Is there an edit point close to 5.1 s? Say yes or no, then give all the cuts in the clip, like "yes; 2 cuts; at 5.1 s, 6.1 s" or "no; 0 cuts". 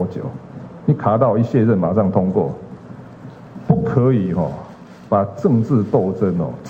no; 0 cuts